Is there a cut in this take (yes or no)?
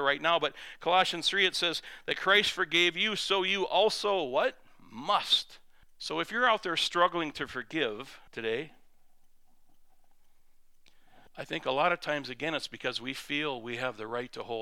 yes